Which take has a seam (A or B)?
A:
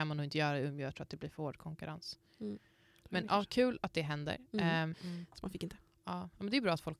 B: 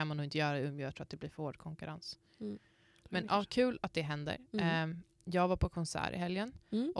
A